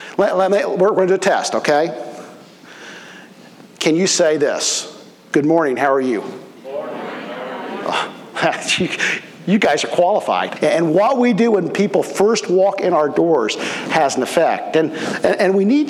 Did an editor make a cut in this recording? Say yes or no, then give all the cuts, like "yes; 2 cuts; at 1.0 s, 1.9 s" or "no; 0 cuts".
yes; 2 cuts; at 6.6 s, 10.6 s